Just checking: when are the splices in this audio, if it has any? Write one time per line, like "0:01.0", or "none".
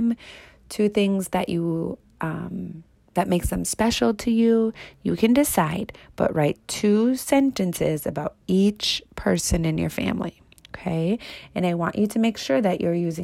none